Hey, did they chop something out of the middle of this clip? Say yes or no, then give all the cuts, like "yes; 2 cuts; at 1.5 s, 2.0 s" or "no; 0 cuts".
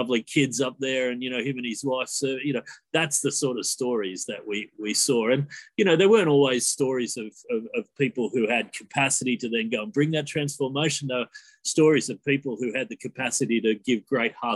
no; 0 cuts